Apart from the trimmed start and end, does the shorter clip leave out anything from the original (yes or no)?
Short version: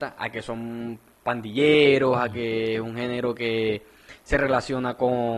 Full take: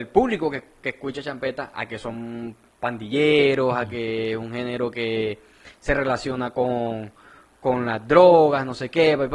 no